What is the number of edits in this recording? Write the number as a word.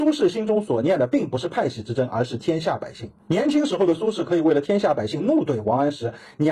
zero